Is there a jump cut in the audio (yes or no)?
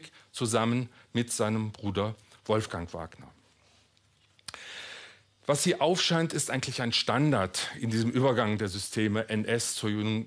no